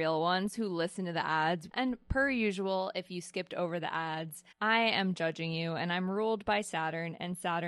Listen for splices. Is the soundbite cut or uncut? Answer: cut